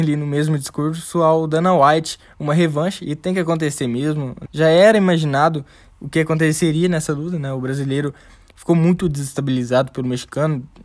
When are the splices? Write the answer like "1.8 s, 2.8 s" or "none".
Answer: 4.5 s